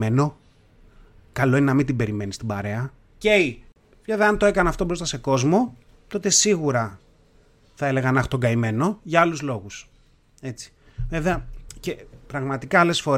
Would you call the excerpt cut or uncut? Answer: cut